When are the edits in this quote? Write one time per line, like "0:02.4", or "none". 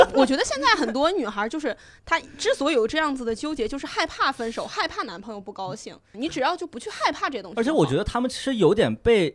0:06.1

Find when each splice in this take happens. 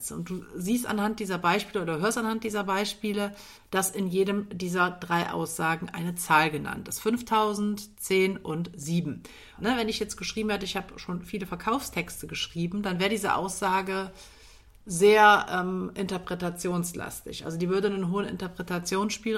0:09.6

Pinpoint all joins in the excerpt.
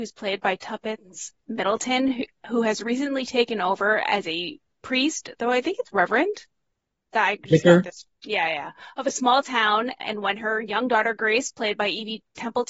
none

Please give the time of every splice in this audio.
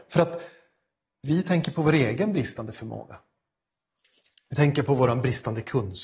none

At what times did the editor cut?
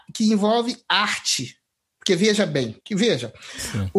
0:02.8

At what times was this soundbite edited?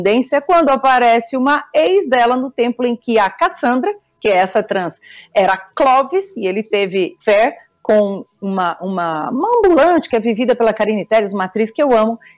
0:07.2

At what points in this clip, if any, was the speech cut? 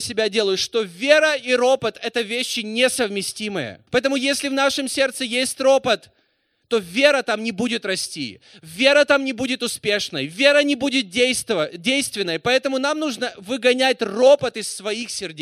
0:03.9

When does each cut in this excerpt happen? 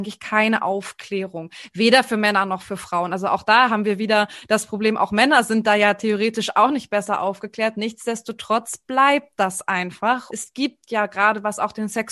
0:07.7
0:10.3

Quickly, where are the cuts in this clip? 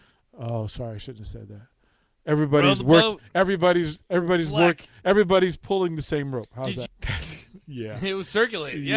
0:06.9

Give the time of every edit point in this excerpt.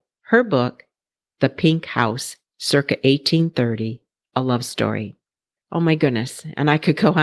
0:05.6

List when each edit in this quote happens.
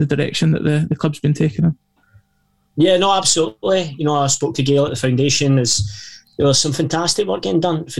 none

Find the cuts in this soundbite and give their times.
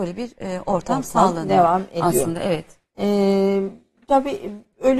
none

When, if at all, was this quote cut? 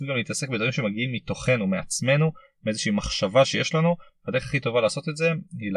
none

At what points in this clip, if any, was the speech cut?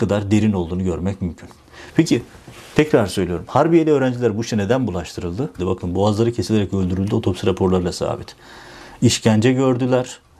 0:05.6

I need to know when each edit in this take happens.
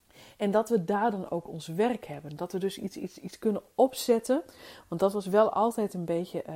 none

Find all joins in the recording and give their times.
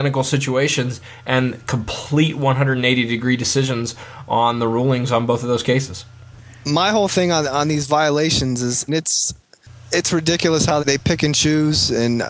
0:08.9
0:10.8

